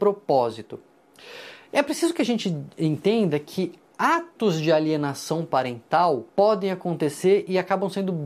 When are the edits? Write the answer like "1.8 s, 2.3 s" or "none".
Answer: 6.3 s